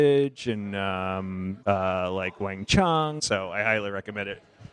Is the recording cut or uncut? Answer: cut